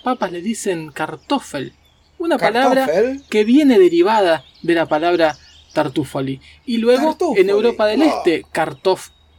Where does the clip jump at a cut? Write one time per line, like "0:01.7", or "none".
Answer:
none